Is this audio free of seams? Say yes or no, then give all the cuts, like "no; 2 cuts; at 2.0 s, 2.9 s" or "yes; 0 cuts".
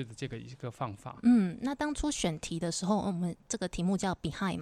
yes; 0 cuts